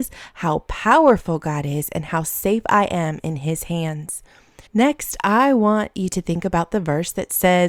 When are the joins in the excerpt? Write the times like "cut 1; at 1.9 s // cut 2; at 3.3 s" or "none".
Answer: cut 1; at 4.7 s